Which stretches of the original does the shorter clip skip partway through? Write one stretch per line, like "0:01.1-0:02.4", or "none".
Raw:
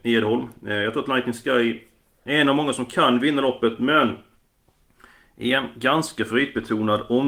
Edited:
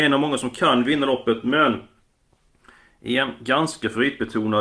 none